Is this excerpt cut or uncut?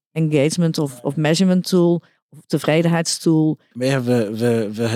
cut